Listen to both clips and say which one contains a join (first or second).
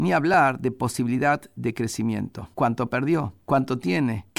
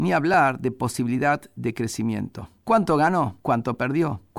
first